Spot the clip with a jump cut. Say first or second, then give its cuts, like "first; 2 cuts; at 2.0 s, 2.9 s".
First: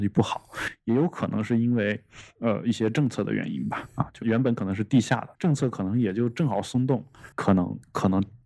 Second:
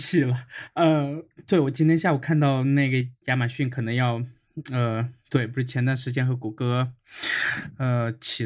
first; 3 cuts; at 4.2 s, 5.3 s, 7.3 s